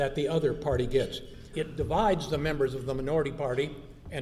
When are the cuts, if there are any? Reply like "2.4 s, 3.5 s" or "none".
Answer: 1.5 s